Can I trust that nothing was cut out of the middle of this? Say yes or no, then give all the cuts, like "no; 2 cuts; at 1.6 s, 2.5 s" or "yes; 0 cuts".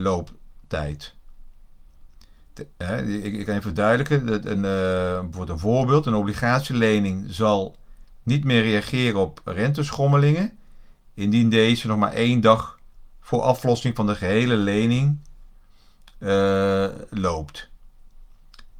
yes; 0 cuts